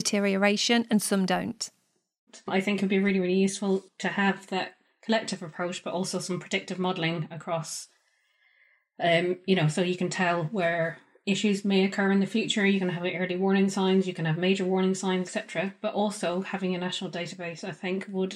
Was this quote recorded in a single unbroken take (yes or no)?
no